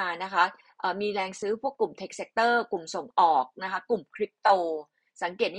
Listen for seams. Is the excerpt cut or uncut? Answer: uncut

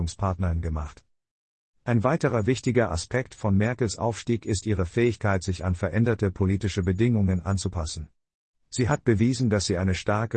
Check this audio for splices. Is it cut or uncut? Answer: cut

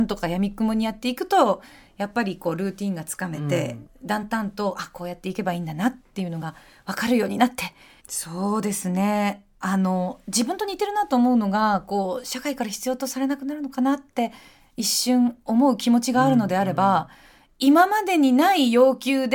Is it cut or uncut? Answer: cut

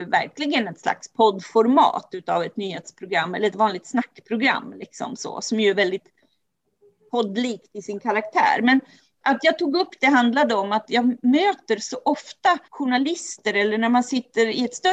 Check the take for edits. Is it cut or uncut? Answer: cut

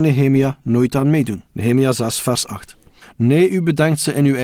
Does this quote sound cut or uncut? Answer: cut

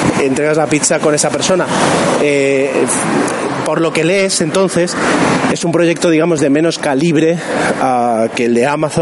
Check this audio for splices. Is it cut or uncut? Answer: uncut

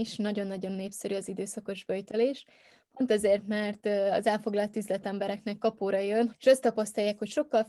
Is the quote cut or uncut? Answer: cut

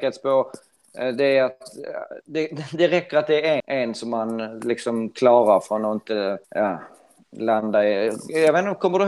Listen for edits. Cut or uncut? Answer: cut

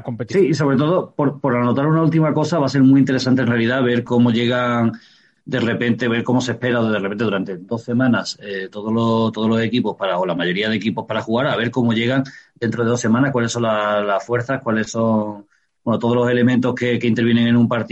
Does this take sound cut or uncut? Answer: cut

